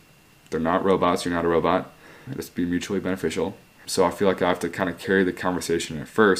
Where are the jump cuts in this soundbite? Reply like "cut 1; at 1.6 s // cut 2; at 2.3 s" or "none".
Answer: cut 1; at 2.3 s // cut 2; at 3.8 s

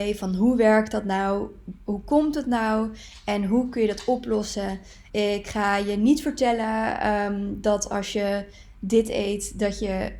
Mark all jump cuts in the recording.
cut 1; at 5.1 s

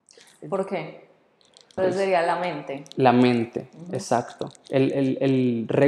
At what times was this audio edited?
cut 1; at 1.8 s

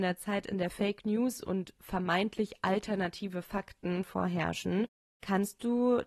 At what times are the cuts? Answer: none

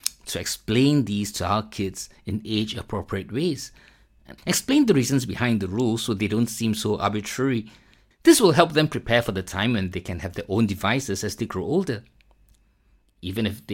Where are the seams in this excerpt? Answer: cut 1; at 4.4 s // cut 2; at 8.1 s

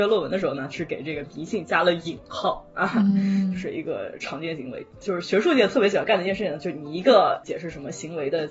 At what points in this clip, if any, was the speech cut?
none

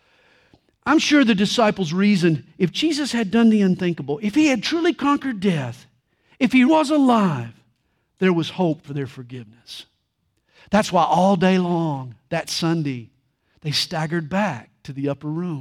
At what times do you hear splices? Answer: cut 1; at 6.7 s // cut 2; at 13.5 s

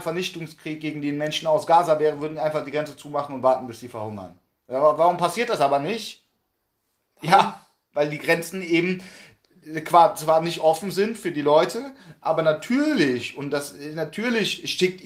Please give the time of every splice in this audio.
none

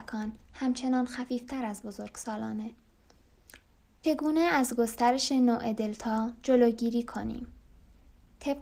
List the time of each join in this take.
cut 1; at 4.0 s

